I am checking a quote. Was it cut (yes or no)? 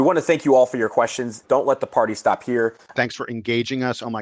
yes